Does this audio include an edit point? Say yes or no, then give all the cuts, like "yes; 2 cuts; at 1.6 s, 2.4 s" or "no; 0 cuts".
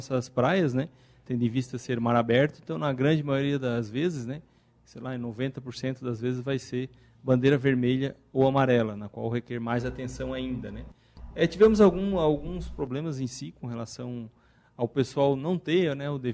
no; 0 cuts